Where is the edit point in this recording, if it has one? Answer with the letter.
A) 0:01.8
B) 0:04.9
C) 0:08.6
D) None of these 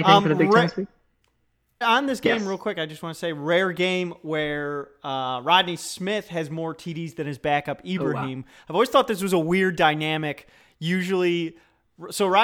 A